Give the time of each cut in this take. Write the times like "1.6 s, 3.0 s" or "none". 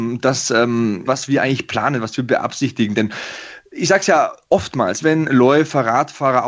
1.1 s, 5.0 s